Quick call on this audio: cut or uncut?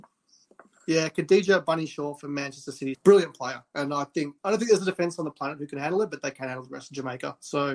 cut